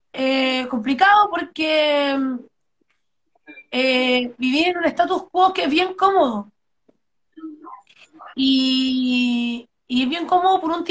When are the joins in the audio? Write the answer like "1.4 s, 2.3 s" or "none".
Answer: none